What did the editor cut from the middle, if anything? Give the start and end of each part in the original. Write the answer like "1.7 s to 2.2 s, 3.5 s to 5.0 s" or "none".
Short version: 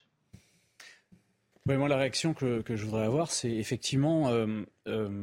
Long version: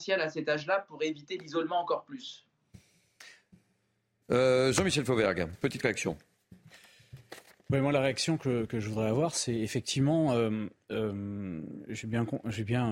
3.9 s to 7.6 s

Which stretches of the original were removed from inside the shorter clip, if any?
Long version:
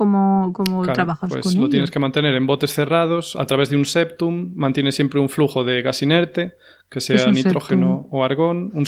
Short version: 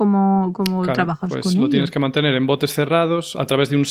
none

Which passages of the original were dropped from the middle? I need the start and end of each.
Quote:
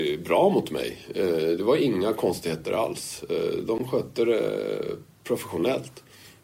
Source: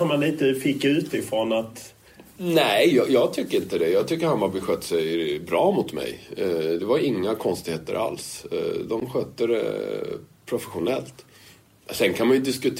none

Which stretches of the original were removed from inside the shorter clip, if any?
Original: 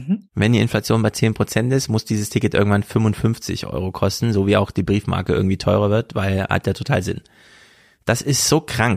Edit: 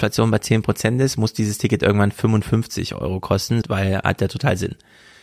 4.3 s to 6.1 s

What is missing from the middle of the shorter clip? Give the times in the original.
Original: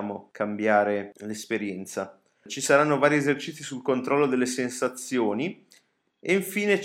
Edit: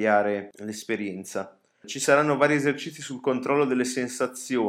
none

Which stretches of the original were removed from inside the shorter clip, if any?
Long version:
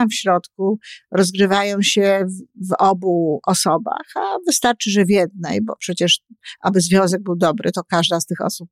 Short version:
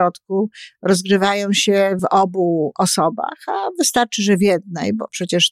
2.3 s to 2.7 s

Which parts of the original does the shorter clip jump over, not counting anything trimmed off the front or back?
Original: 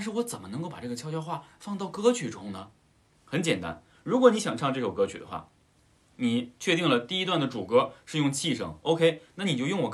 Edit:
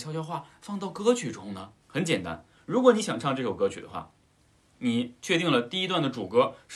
2.8 s to 3.2 s

